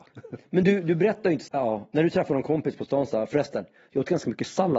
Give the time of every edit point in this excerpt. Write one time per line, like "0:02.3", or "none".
0:01.5